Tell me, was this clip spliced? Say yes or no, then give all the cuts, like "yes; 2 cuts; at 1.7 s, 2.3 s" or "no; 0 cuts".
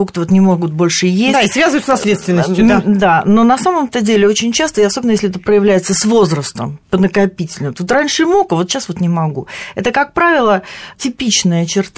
no; 0 cuts